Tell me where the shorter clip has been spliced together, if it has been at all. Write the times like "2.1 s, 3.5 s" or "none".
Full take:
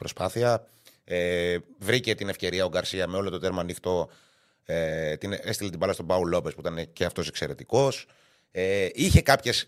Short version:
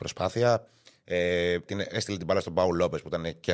1.7 s